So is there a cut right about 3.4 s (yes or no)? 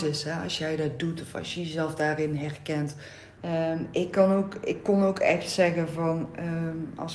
yes